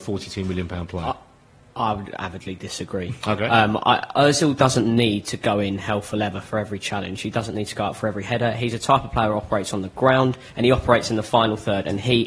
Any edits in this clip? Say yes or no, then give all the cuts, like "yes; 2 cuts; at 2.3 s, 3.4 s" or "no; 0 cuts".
no; 0 cuts